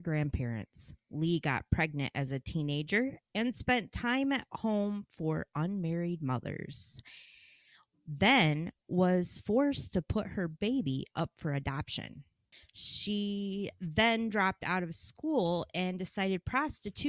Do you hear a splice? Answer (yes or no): no